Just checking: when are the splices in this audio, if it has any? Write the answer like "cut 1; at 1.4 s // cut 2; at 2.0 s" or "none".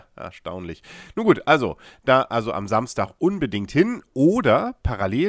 none